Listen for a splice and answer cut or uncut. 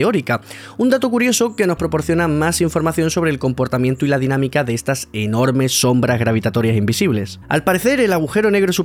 cut